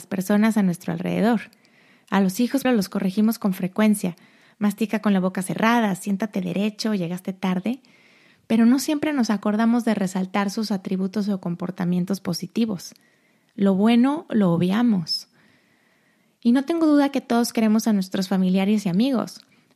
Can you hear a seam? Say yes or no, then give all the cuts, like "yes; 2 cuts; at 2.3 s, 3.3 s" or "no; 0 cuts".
yes; 1 cut; at 2.6 s